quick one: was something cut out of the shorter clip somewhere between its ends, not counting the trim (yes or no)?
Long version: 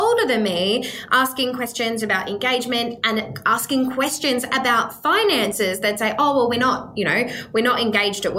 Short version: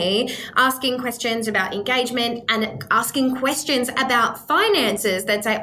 no